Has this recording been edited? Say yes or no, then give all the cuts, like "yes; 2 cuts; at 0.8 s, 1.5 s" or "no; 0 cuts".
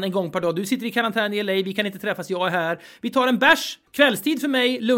yes; 1 cut; at 3.9 s